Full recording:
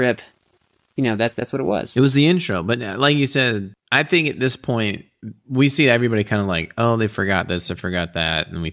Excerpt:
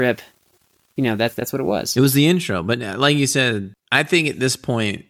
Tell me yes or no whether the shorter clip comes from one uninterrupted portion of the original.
yes